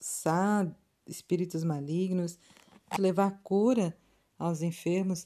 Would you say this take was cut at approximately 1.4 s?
no; 1 cut; at 3.0 s

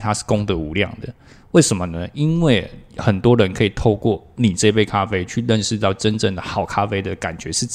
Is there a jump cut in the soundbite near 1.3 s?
no; 0 cuts

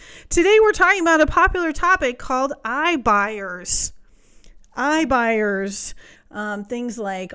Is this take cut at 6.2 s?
yes; 1 cut; at 6.2 s

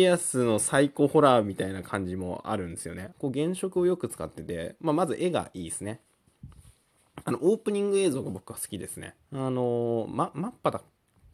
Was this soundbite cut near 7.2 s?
no; 2 cuts; at 3.1 s, 9.2 s

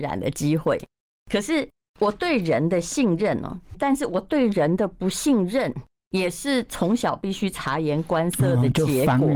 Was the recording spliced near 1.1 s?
no; 1 cut; at 3.7 s

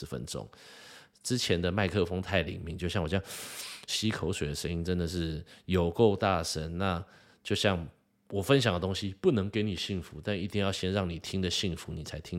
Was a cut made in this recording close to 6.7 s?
no; 0 cuts

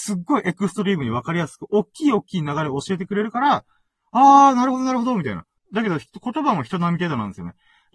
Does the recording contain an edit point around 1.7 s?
no; 1 cut; at 5.6 s

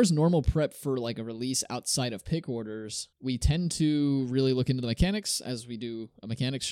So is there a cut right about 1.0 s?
no; 1 cut; at 3.2 s

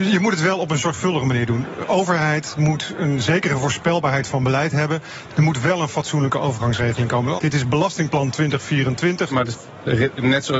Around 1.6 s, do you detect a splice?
no; 3 cuts; at 5.3 s, 7.4 s, 9.3 s

